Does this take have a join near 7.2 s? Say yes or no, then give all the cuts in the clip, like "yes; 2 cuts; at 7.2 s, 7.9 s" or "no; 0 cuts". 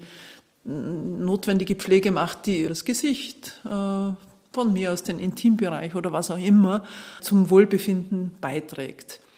yes; 2 cuts; at 2.7 s, 7.2 s